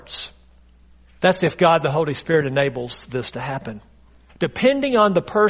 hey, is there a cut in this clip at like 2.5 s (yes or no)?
no